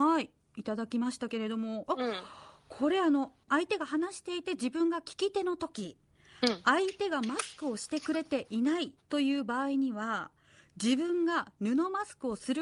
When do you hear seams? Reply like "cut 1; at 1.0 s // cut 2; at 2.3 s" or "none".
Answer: none